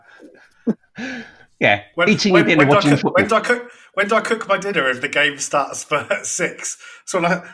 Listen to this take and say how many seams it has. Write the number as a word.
zero